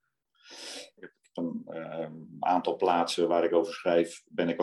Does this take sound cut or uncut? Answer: cut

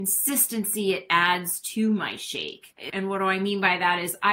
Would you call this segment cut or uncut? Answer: cut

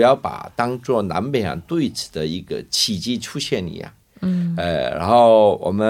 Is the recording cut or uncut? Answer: cut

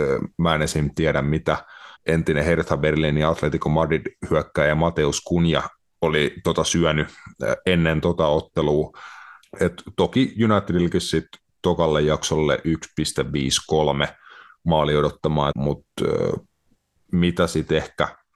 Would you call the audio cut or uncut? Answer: cut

